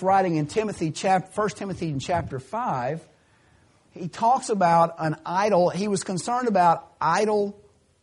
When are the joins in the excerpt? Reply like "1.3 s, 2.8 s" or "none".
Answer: none